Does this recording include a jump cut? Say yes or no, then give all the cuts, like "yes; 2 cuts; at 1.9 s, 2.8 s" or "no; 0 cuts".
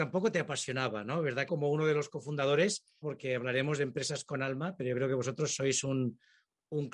yes; 2 cuts; at 1.5 s, 3.0 s